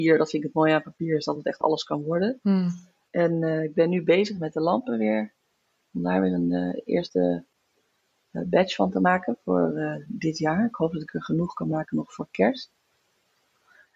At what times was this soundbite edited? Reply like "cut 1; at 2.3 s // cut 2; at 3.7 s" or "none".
cut 1; at 3.1 s